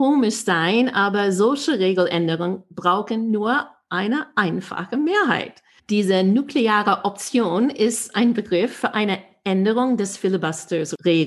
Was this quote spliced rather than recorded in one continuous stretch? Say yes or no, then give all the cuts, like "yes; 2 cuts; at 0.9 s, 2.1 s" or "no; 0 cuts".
yes; 1 cut; at 5.8 s